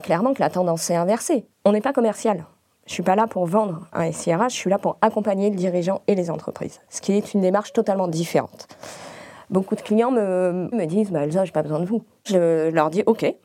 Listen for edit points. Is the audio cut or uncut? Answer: cut